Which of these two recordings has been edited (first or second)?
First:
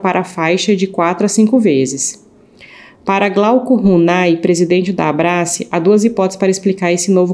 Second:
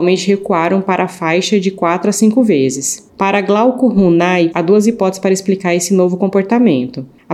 second